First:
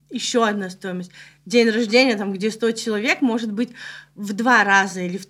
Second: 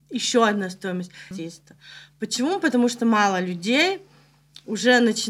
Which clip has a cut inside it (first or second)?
second